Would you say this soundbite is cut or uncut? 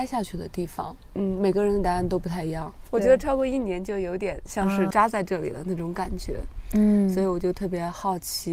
cut